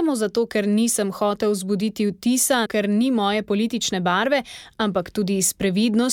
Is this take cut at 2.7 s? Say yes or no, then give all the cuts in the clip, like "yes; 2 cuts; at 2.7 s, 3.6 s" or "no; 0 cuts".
yes; 1 cut; at 2.7 s